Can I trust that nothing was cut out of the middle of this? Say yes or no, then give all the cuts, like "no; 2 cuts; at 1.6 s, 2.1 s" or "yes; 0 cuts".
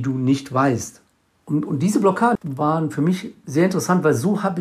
no; 1 cut; at 2.4 s